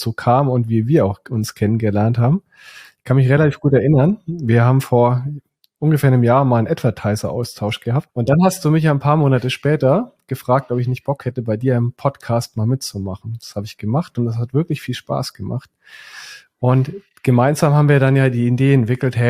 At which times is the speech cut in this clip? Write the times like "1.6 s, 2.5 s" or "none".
8.1 s